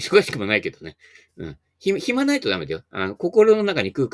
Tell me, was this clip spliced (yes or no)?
no